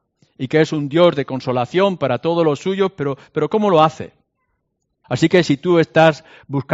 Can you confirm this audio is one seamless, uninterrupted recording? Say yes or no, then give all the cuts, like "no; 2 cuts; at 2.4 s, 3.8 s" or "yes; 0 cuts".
no; 1 cut; at 5.0 s